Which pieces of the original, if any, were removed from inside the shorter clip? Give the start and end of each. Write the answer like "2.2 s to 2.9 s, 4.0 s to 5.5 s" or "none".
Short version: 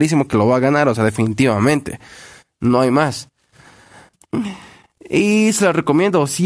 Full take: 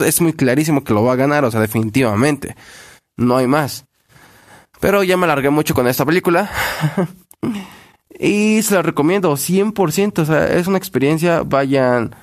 4.7 s to 7.2 s

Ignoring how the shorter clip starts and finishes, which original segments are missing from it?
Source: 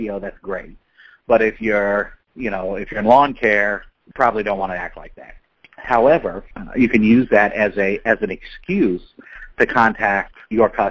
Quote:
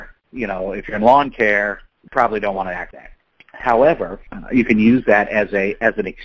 4.9 s to 5.1 s

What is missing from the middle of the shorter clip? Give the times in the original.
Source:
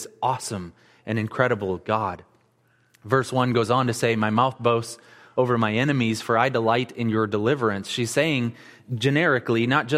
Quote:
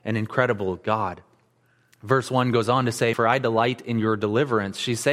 4.1 s to 6.2 s

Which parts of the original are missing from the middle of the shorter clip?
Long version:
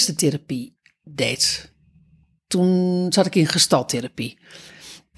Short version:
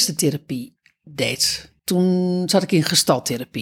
1.8 s to 2.4 s

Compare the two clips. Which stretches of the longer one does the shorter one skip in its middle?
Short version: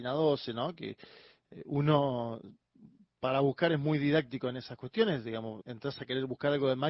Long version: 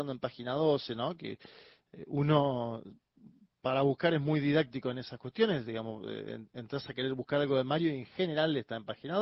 6.0 s to 6.5 s

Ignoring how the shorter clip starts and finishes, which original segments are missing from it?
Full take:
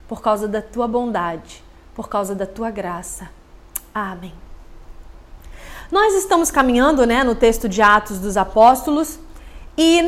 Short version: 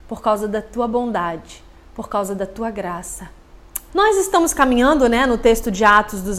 3.9 s to 5.9 s

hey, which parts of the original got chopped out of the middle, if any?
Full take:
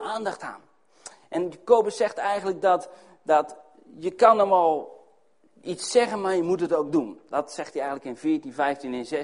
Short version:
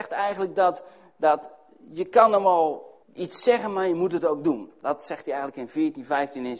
5.1 s to 5.5 s

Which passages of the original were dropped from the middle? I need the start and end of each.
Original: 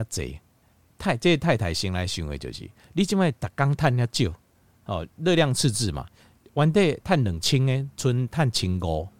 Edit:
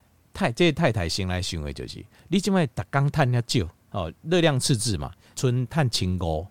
4.4 s to 4.7 s, 6.3 s to 7.9 s

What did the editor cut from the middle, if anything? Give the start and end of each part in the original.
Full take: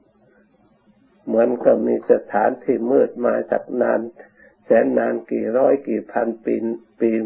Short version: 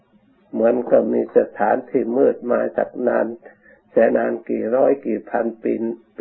4.8 s to 4.9 s

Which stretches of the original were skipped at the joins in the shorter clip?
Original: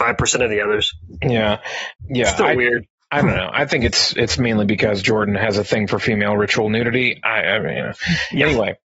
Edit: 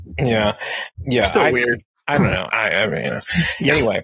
3.5 s to 7.2 s

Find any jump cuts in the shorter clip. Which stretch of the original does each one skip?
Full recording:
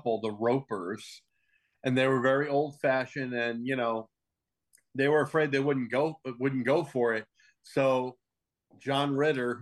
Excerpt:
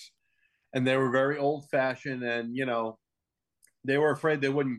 none

